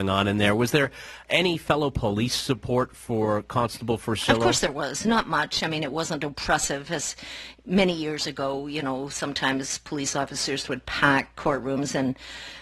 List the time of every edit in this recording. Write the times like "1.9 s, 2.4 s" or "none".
none